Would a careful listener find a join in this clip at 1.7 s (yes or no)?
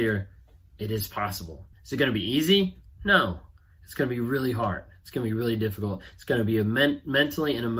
yes